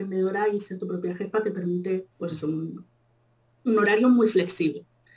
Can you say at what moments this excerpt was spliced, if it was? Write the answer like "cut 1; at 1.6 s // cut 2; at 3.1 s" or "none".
cut 1; at 2.1 s